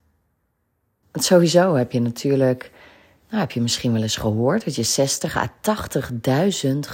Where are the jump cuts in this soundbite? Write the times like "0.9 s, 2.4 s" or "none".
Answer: 1.0 s